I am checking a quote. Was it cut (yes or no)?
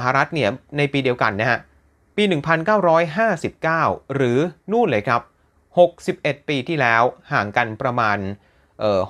no